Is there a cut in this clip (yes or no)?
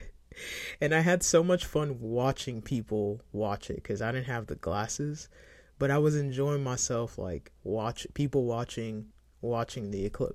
no